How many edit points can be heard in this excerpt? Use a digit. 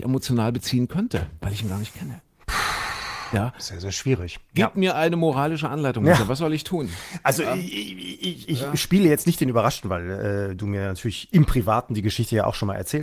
1